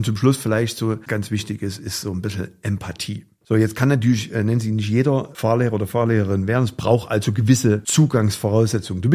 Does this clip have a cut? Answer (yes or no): yes